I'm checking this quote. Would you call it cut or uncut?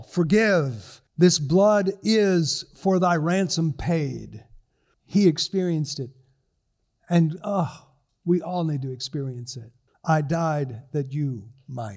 cut